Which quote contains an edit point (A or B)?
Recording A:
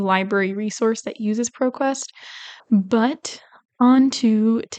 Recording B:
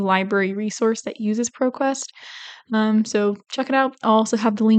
A